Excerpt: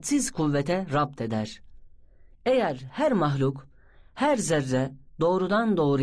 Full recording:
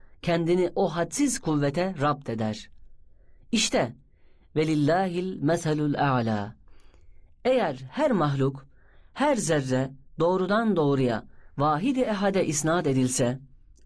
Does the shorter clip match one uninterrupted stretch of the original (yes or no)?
no